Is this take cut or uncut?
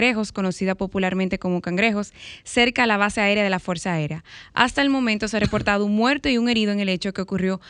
uncut